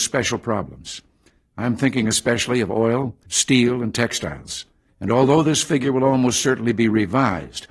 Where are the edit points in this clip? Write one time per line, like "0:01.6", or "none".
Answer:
0:03.3
0:04.9